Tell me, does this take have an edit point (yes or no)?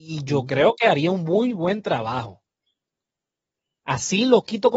no